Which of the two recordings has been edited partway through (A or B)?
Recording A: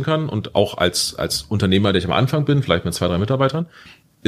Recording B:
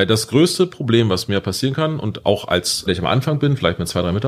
B